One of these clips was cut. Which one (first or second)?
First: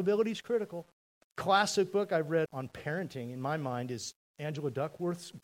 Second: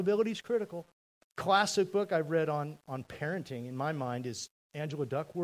first